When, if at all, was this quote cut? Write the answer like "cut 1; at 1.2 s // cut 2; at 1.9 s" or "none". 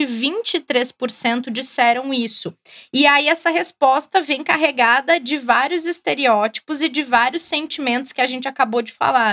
none

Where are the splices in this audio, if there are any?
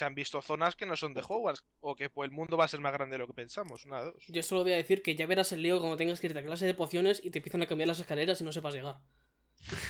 cut 1; at 1.6 s

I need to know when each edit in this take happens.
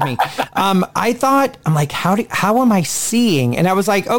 cut 1; at 0.9 s

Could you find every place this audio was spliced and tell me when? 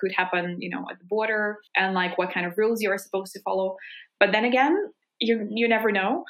cut 1; at 1.7 s // cut 2; at 4.2 s

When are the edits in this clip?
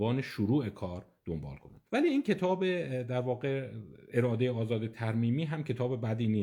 cut 1; at 1.9 s

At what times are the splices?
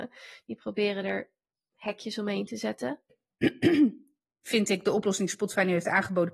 cut 1; at 3.1 s

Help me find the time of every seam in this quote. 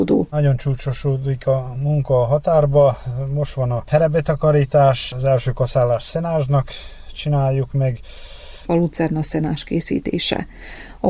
cut 1; at 8.6 s

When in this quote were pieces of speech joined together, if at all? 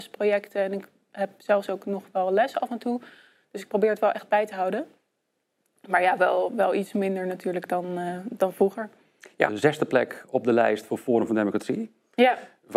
cut 1; at 9.5 s

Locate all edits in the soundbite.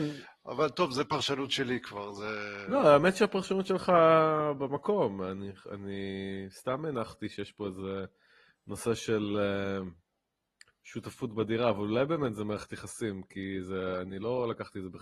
none

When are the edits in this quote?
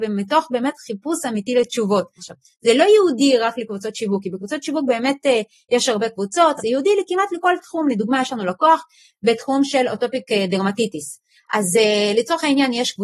cut 1; at 2.2 s // cut 2; at 6.6 s

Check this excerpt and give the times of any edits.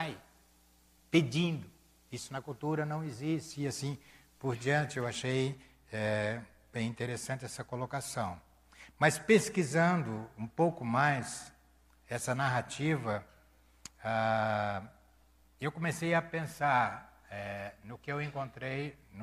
none

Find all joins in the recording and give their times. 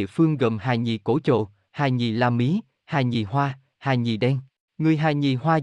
cut 1; at 4.7 s

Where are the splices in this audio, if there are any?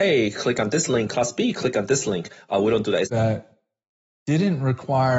cut 1; at 3.0 s

